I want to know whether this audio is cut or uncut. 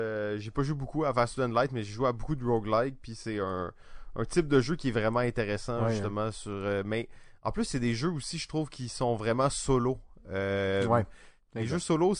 uncut